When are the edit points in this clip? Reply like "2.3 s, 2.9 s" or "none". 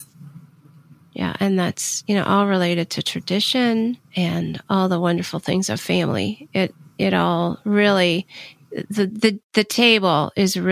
4.0 s